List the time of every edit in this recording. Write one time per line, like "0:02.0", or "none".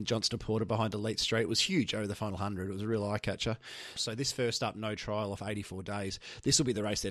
0:04.0